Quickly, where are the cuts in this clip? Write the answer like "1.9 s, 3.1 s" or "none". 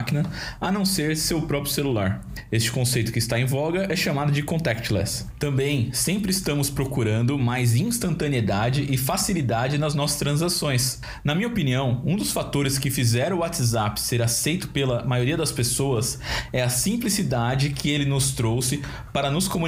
none